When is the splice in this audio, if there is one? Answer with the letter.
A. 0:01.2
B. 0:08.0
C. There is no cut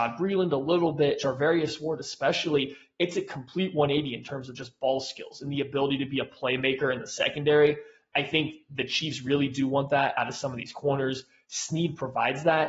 C